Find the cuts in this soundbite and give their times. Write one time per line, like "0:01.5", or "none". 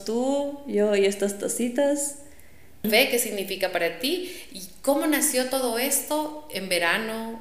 0:02.8